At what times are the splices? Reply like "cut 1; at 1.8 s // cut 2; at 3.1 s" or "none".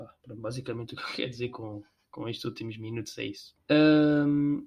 cut 1; at 3.6 s